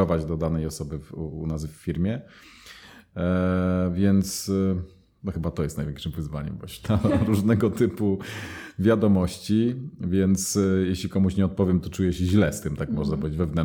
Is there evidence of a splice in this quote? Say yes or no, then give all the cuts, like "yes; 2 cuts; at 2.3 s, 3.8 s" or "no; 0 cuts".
yes; 1 cut; at 6.8 s